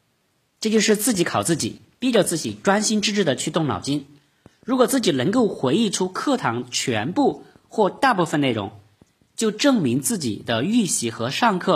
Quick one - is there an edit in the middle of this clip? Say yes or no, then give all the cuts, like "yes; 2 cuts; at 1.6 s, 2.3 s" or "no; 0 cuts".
no; 0 cuts